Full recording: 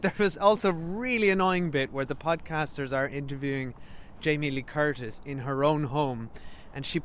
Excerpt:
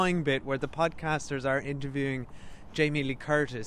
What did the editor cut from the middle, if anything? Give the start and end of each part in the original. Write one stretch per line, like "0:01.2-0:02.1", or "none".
none